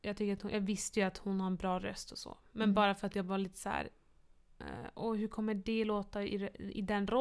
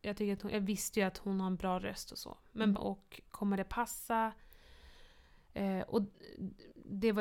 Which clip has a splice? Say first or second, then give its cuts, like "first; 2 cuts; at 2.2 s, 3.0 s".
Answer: second; 1 cut; at 2.7 s